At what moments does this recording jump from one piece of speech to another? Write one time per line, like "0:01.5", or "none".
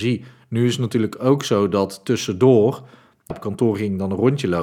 0:03.3